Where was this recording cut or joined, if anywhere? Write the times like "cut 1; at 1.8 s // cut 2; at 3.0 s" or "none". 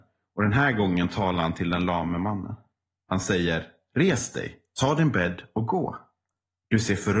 none